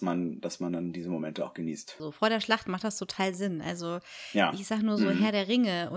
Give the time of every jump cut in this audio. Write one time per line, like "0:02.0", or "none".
0:02.0